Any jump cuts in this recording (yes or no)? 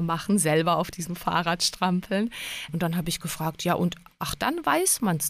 yes